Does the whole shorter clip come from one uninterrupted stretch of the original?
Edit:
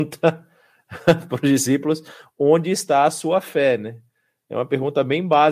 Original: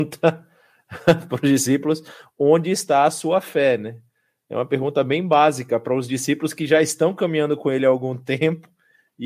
yes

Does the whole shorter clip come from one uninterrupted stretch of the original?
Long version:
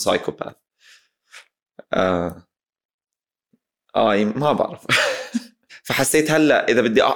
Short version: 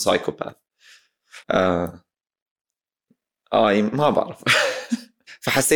no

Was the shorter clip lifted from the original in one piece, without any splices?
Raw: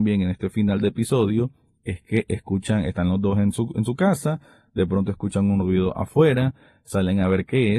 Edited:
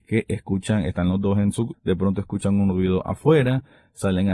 no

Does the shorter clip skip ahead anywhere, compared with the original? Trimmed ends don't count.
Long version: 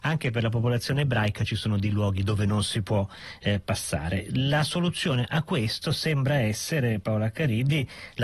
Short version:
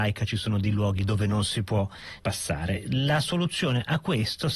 yes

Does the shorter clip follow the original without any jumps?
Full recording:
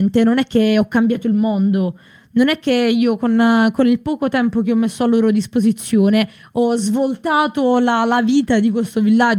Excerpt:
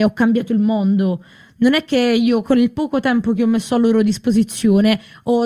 no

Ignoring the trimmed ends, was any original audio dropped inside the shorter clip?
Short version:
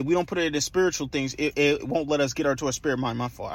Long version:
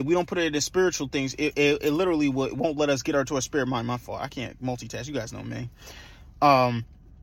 yes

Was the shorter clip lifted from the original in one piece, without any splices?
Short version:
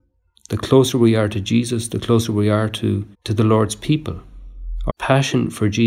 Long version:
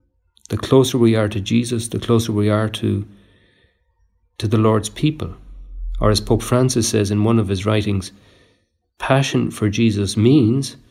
no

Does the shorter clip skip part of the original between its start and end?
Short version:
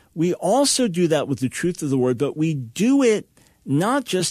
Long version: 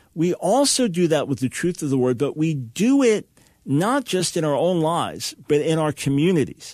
no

